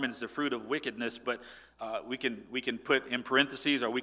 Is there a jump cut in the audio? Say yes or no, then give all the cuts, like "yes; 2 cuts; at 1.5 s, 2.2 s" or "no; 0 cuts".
no; 0 cuts